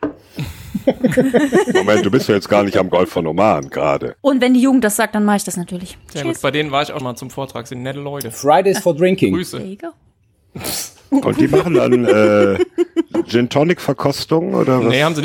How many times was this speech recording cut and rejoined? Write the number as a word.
two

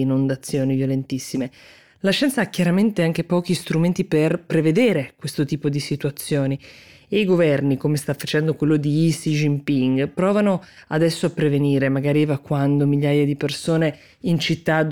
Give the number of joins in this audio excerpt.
zero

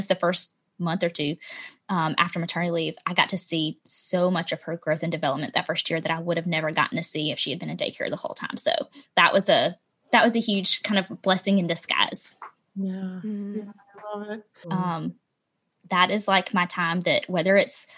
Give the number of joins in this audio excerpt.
one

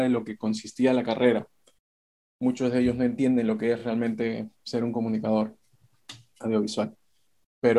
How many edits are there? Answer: zero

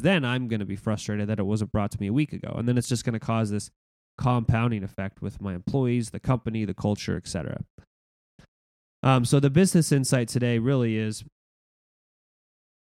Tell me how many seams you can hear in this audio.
zero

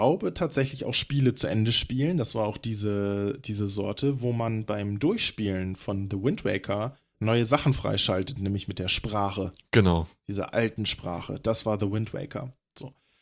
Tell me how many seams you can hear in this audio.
zero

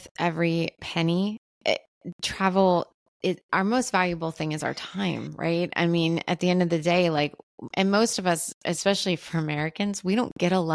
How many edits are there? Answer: zero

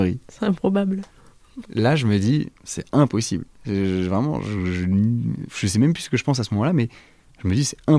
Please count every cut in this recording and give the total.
two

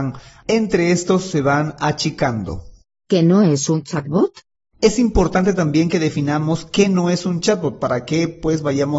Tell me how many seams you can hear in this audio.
zero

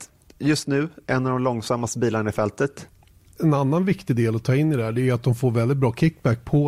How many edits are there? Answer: one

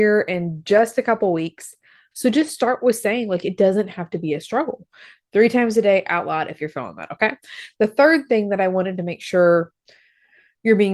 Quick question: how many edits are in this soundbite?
one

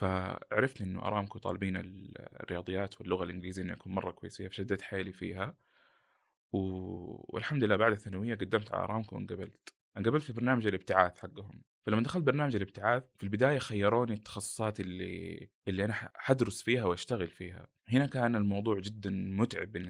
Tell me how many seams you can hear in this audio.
zero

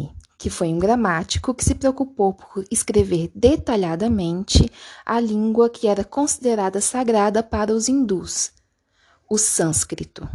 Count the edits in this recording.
zero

